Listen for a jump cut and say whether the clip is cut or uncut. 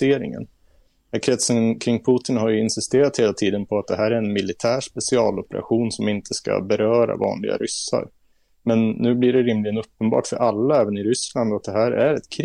uncut